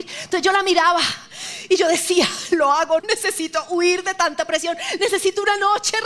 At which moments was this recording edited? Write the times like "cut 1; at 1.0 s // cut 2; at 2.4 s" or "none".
cut 1; at 3.0 s